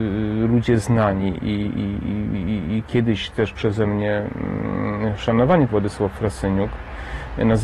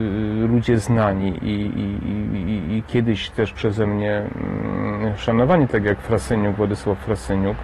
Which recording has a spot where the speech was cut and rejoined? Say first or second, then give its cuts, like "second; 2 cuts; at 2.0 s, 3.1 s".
first; 1 cut; at 5.7 s